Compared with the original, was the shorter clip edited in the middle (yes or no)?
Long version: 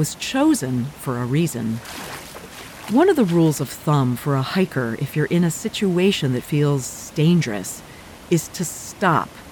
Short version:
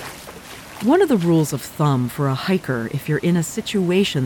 no